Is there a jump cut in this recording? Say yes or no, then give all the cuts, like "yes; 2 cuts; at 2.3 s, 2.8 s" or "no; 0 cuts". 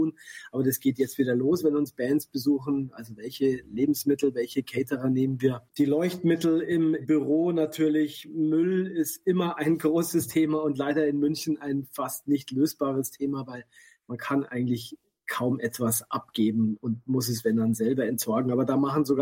yes; 1 cut; at 5.7 s